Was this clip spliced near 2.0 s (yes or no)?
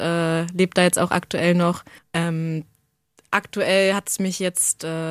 yes